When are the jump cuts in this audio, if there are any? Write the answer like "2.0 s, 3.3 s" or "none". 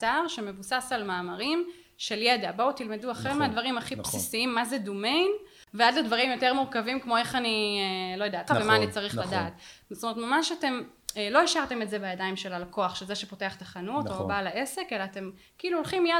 8.5 s